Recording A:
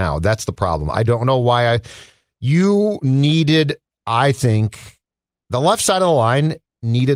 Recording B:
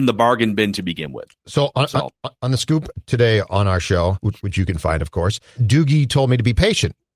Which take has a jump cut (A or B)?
B